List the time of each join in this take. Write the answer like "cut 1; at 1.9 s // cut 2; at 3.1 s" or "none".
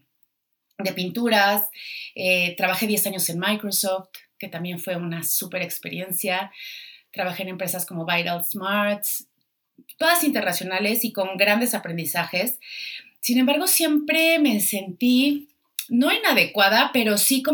none